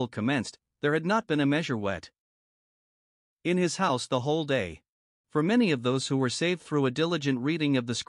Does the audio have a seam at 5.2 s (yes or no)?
yes